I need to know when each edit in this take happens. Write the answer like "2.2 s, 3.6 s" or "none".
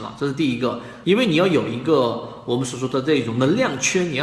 1.0 s